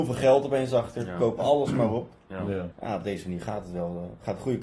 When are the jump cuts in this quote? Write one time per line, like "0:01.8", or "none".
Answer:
0:02.7